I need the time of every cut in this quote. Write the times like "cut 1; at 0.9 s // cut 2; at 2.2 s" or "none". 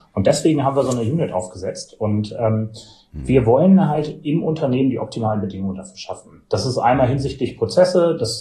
none